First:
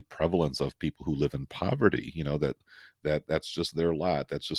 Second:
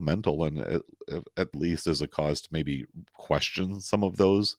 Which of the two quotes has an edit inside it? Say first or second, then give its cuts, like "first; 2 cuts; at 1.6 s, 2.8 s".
second; 1 cut; at 1.5 s